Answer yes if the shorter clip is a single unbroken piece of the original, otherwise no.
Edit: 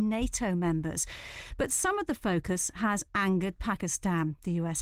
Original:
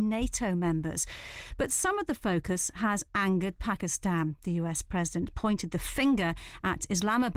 yes